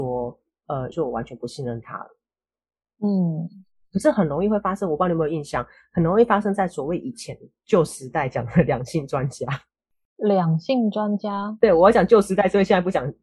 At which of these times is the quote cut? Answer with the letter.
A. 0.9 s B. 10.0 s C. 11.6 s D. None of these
A